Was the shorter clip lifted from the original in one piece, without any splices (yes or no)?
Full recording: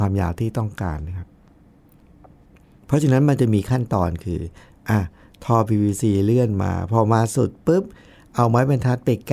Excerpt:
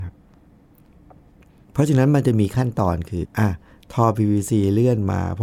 no